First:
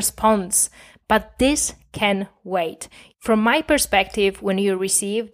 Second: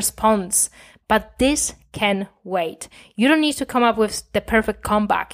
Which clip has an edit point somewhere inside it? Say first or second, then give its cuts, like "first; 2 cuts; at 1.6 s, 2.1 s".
first; 1 cut; at 3.1 s